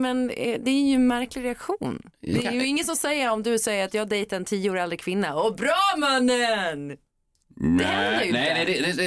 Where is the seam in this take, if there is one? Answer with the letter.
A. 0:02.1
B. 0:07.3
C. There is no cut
A